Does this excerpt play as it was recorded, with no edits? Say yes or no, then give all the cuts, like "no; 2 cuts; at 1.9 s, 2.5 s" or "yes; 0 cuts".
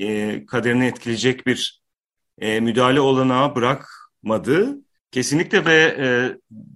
no; 1 cut; at 5.0 s